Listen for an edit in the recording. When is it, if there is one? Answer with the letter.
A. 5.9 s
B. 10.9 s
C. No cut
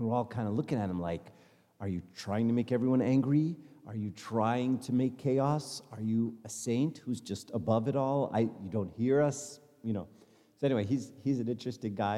C